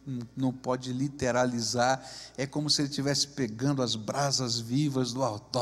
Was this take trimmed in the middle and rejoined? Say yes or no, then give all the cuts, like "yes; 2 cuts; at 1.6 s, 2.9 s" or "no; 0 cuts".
no; 0 cuts